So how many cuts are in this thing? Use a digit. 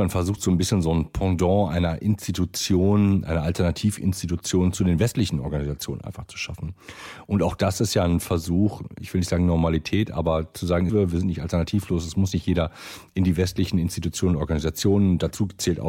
1